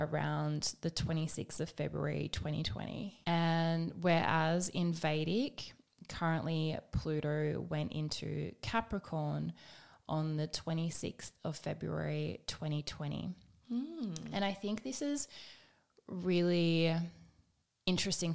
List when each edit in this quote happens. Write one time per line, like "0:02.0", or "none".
0:03.2

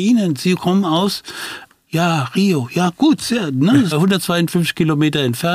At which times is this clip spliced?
0:01.7
0:03.9

